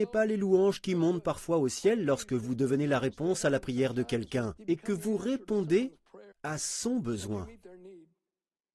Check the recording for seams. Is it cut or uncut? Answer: cut